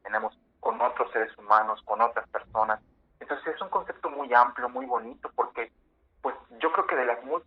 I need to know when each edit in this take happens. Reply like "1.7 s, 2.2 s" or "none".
none